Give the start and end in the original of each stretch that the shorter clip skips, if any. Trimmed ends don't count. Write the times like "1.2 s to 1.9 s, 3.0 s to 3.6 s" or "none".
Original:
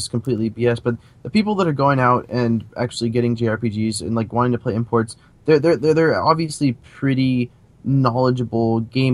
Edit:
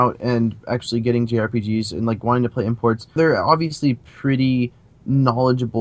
5.3 s to 5.9 s